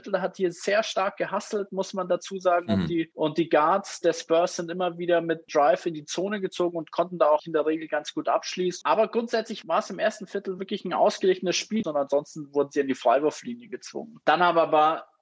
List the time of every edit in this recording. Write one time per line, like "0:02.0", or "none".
0:07.4
0:08.8
0:11.8